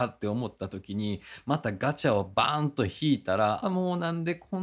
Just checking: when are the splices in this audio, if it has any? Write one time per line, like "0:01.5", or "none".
0:03.6